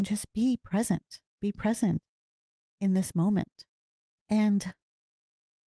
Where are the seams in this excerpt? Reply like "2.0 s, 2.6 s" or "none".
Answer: 4.2 s